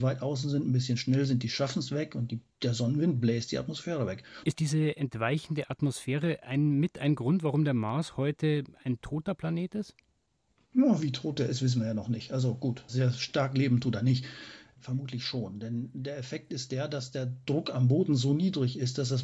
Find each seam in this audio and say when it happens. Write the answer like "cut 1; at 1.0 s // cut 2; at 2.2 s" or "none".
cut 1; at 4.4 s // cut 2; at 12.9 s